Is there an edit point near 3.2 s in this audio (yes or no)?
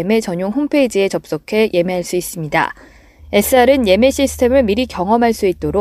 yes